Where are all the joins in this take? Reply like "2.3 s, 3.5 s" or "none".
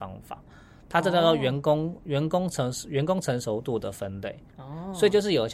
4.5 s